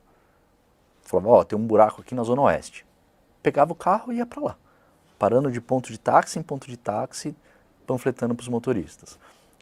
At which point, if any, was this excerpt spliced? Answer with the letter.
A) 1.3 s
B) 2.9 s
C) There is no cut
C